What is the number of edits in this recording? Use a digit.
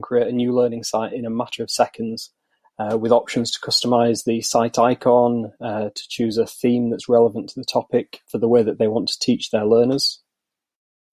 1